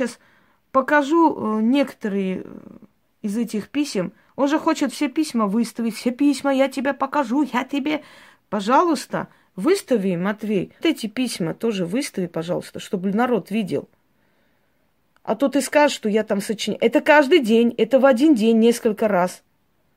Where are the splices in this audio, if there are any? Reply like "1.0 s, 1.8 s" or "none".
10.8 s